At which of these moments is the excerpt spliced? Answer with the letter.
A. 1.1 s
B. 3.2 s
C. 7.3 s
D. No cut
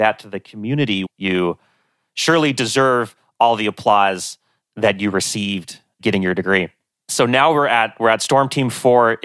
A